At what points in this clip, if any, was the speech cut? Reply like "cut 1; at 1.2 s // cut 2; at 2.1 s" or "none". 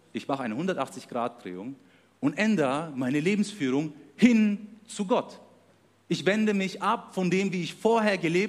none

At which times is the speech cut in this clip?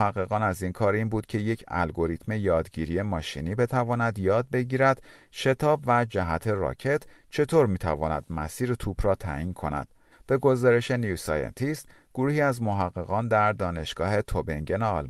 cut 1; at 10.1 s

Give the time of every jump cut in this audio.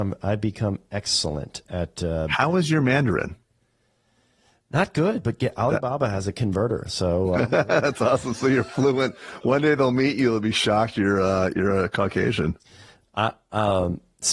none

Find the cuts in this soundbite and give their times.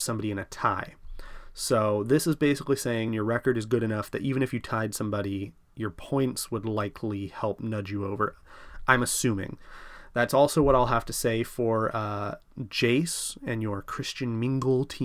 cut 1; at 3.1 s

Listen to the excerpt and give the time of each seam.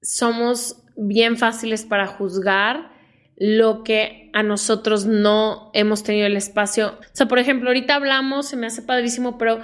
cut 1; at 7.0 s

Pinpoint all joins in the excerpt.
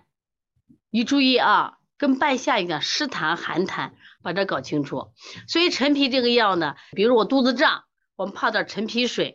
cut 1; at 4.2 s // cut 2; at 6.9 s

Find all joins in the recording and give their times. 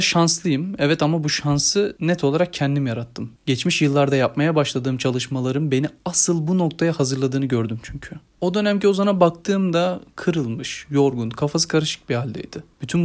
none

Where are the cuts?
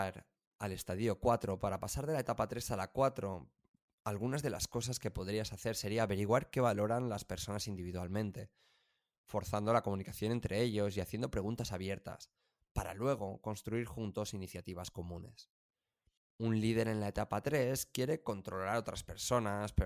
cut 1; at 16.2 s

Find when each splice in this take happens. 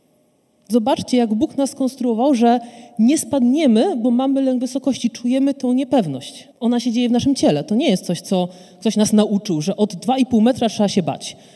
cut 1; at 6.5 s

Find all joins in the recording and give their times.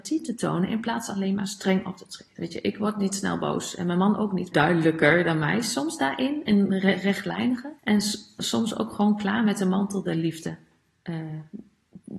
cut 1; at 2.4 s // cut 2; at 4.5 s // cut 3; at 7.8 s

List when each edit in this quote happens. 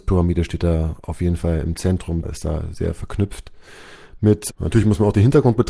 cut 1; at 2.2 s // cut 2; at 4.5 s

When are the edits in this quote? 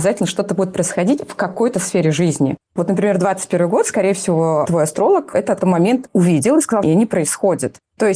cut 1; at 5.6 s // cut 2; at 6.8 s

